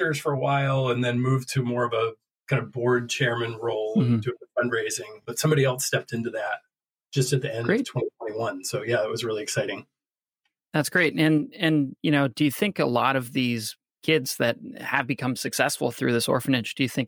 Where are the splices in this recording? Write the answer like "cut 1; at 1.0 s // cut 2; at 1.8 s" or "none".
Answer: none